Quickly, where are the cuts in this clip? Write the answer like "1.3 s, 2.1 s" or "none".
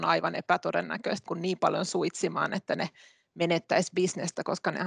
1.3 s